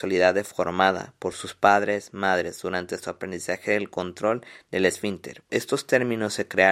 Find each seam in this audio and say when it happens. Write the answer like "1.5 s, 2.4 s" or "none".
5.5 s